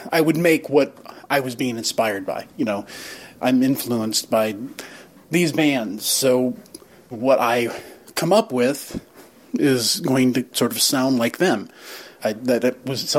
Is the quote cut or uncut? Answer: cut